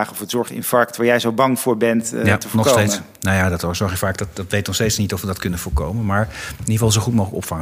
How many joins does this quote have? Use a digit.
0